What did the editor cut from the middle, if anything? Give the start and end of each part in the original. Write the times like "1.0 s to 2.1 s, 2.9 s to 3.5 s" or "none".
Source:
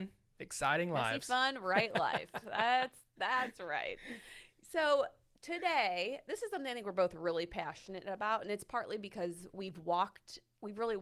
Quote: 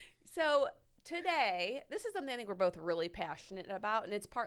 none